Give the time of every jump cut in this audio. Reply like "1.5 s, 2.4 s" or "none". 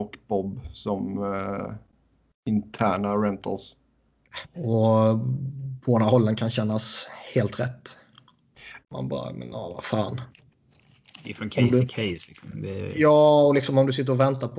4.4 s, 8.8 s